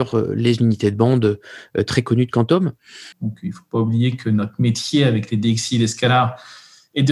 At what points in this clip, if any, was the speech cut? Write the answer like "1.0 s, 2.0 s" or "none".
3.1 s